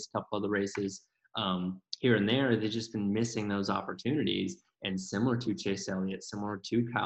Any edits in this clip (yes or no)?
no